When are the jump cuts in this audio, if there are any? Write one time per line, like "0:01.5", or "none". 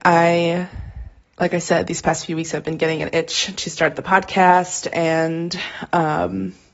none